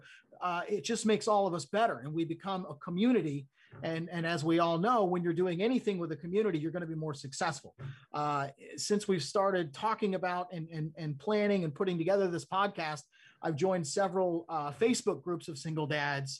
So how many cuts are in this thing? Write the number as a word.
zero